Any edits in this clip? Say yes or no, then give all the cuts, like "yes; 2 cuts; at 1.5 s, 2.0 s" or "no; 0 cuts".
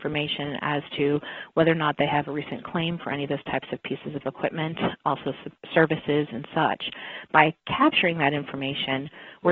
yes; 1 cut; at 5.0 s